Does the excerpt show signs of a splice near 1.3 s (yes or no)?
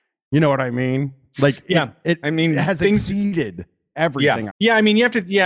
no